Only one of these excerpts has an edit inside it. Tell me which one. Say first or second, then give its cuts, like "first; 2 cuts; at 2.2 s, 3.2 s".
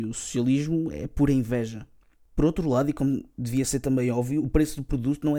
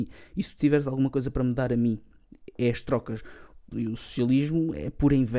second; 1 cut; at 3.7 s